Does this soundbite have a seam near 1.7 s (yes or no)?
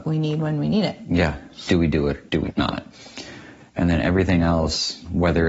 yes